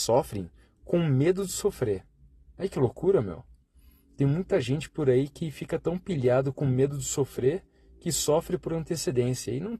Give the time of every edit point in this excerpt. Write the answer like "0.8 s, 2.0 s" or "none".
none